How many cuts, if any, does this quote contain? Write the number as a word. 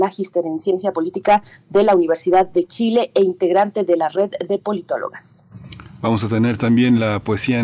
zero